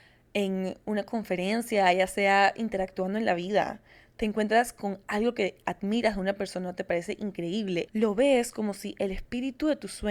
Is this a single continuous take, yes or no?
no